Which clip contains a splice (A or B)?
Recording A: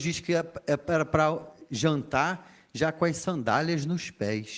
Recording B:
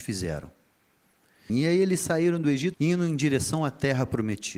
B